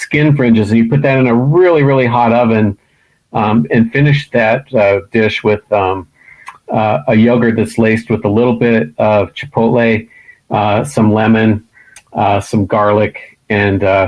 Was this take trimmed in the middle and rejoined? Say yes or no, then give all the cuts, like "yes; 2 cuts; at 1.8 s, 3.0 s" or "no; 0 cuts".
no; 0 cuts